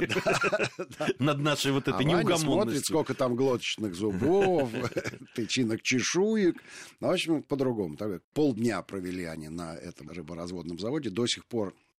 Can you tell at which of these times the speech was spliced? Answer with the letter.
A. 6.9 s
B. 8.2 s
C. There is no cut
B